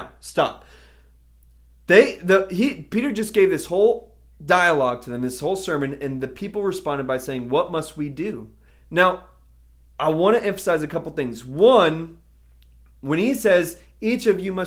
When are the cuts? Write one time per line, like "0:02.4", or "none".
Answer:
0:08.7